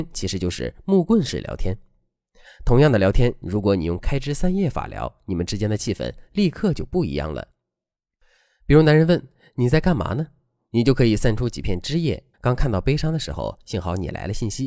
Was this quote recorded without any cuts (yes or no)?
no